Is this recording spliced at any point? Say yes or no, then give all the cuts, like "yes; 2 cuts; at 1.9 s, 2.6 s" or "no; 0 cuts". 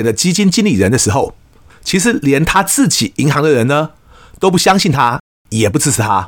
yes; 1 cut; at 1.7 s